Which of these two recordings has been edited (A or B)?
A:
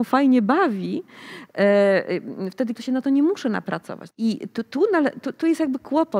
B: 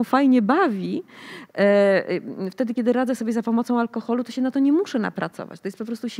A